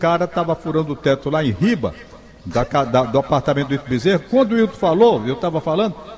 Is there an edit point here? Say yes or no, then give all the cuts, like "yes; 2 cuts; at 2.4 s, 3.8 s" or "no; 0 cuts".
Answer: no; 0 cuts